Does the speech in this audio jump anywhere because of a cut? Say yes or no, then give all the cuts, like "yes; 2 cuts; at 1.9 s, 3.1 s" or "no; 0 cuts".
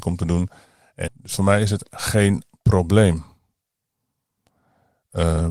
yes; 1 cut; at 1.1 s